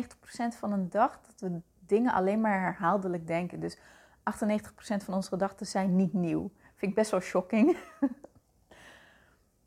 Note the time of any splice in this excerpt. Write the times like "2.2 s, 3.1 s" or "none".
none